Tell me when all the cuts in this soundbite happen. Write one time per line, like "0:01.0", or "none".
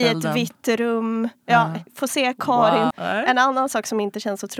0:01.9
0:02.9